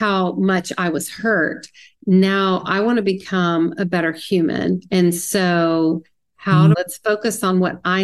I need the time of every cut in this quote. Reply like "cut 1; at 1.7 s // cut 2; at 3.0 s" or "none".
cut 1; at 6.7 s